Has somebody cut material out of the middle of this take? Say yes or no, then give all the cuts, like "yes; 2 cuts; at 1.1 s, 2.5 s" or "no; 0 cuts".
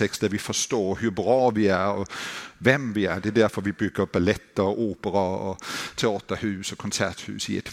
no; 0 cuts